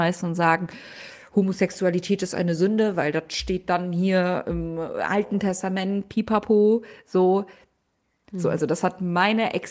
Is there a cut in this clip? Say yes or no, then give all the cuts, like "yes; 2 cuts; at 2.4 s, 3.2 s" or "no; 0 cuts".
yes; 1 cut; at 8.2 s